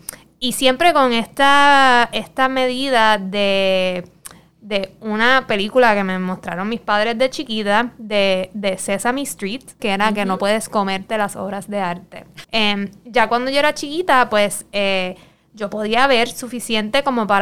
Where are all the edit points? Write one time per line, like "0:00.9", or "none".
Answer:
0:09.8
0:12.4

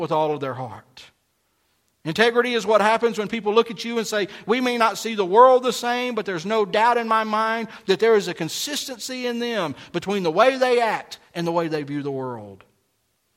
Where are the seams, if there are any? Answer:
none

